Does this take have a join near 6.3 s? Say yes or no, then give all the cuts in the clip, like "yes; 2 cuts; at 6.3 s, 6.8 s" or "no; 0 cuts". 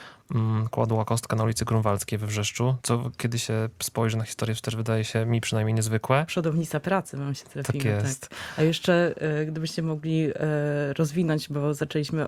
no; 1 cut; at 2.8 s